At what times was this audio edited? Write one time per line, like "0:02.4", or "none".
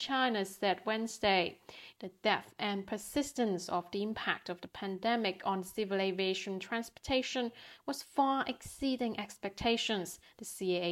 0:02.0